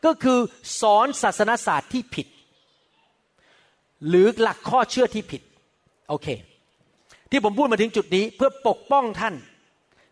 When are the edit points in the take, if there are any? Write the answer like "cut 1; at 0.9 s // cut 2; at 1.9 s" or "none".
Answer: none